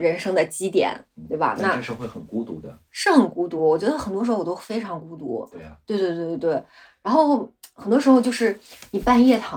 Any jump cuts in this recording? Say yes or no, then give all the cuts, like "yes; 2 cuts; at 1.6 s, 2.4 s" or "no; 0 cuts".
no; 0 cuts